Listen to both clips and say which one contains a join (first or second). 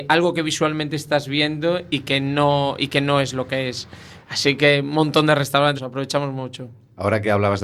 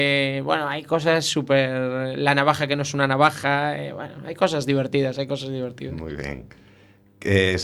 first